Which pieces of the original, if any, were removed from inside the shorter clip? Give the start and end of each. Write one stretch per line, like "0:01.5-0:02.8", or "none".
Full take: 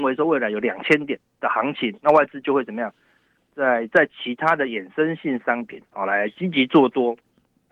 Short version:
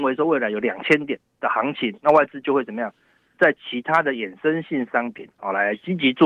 0:03.3-0:03.9